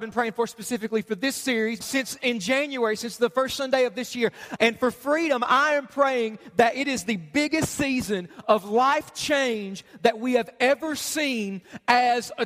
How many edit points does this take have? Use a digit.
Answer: 3